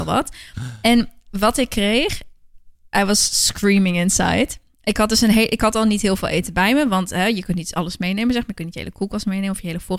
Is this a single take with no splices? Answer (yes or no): yes